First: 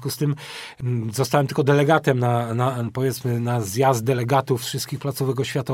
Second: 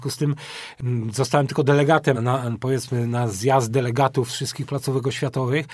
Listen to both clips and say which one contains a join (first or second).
second